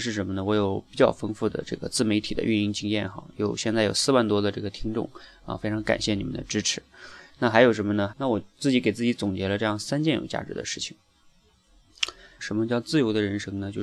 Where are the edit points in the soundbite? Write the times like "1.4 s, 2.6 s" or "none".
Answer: 8.1 s, 12.4 s